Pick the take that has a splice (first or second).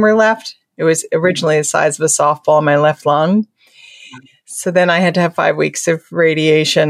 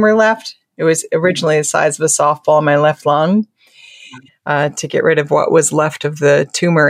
second